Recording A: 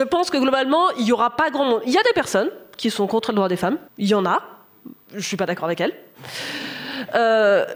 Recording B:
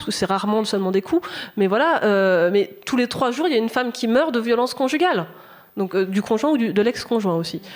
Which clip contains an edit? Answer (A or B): A